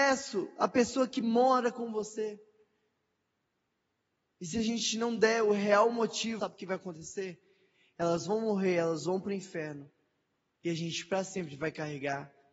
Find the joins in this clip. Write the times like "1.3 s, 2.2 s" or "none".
6.4 s